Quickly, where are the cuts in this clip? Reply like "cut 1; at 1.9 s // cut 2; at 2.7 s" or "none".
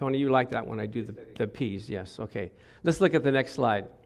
none